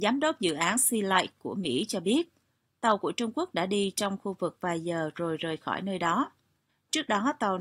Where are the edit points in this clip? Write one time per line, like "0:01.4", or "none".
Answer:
0:06.7